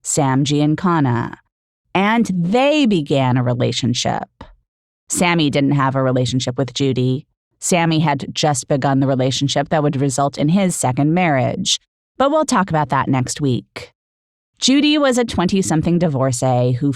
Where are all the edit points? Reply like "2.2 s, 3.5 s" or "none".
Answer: 14.4 s